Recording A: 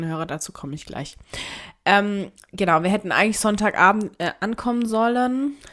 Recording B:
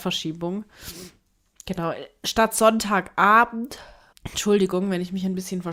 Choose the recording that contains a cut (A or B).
B